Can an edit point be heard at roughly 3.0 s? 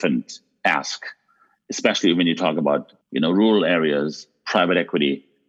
yes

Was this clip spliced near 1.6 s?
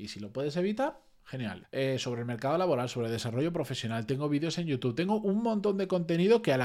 yes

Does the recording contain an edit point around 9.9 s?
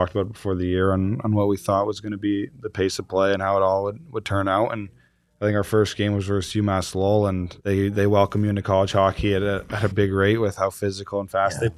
yes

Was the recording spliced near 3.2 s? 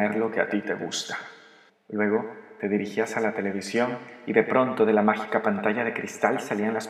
no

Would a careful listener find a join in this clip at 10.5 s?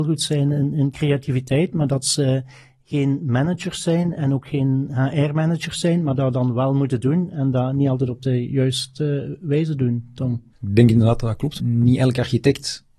yes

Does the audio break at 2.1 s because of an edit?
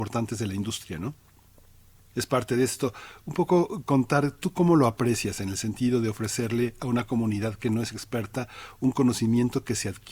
yes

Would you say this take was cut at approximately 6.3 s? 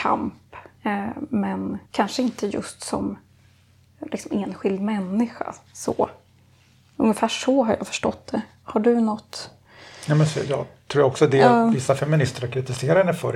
no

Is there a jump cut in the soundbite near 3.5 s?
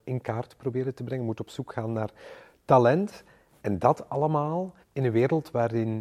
no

